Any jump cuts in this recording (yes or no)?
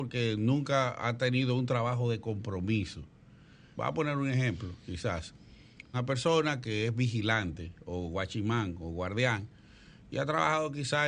yes